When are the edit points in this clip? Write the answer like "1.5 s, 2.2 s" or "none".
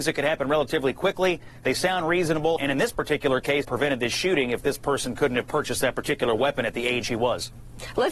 2.6 s, 3.6 s